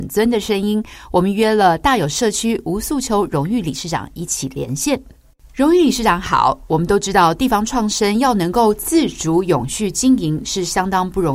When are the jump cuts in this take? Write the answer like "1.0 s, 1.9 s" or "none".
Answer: none